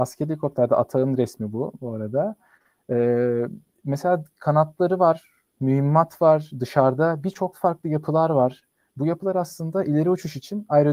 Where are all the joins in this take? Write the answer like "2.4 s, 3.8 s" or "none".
7.5 s

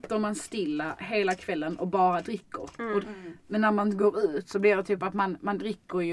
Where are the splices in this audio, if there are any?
3.0 s

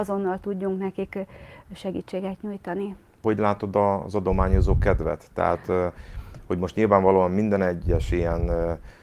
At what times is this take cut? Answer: none

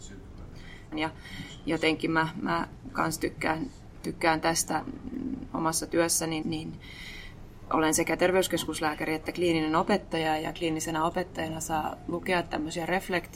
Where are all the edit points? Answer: 0.9 s, 6.4 s

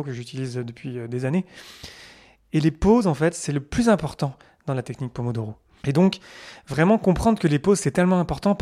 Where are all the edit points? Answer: 5.8 s

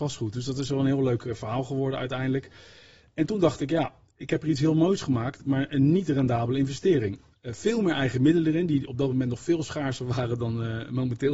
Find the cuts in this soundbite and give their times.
none

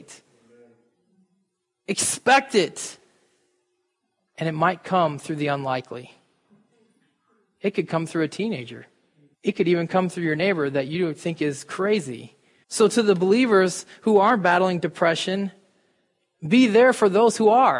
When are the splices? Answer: 9.3 s, 12.6 s

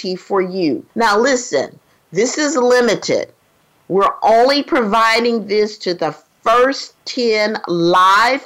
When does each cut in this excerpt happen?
0.9 s

